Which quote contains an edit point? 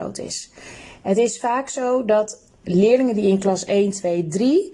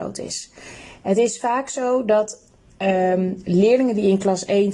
first; 1 cut; at 2.6 s

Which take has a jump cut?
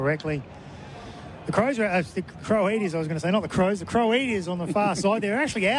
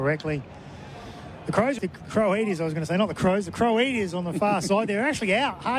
second; 1 cut; at 1.8 s

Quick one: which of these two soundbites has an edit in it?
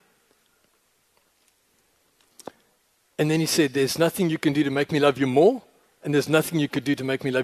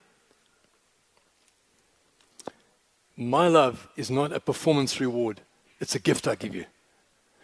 second; 1 cut; at 3.1 s

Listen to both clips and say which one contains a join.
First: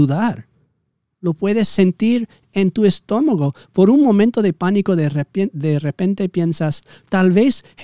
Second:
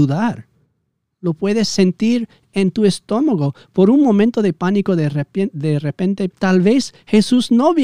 second; 1 cut; at 6.3 s

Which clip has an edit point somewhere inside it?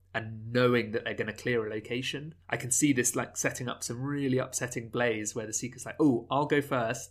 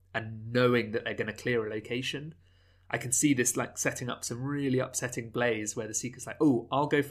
first; 1 cut; at 2.4 s

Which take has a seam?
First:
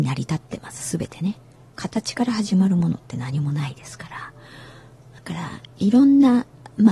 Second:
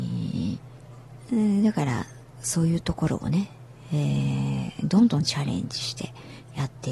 first; 2 cuts; at 1.8 s, 5.2 s

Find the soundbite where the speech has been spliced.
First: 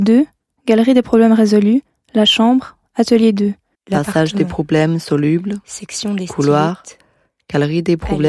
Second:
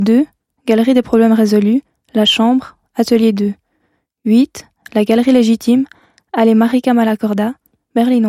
first; 1 cut; at 3.7 s

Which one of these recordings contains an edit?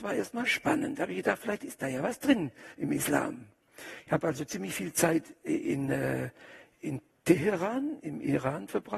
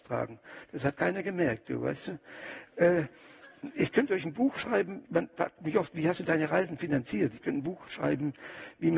second; 1 cut; at 5.0 s

